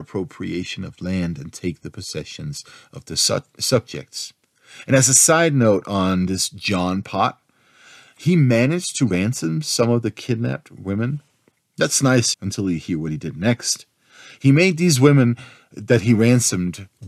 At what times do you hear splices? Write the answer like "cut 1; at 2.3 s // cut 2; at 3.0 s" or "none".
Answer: cut 1; at 12.3 s